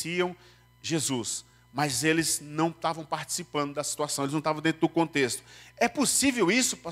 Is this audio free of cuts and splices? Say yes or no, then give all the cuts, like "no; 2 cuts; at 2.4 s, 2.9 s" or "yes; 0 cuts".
yes; 0 cuts